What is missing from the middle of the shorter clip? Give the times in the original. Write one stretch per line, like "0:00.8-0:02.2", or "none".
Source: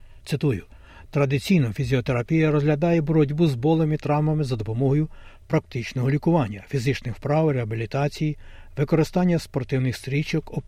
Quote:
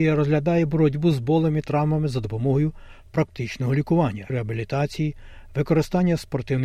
0:06.7-0:07.5